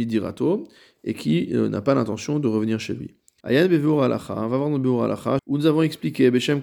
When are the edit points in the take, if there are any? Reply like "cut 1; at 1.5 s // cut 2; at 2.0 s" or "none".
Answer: cut 1; at 3.4 s // cut 2; at 5.4 s